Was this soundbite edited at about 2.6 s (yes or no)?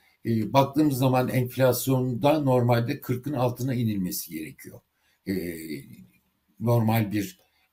no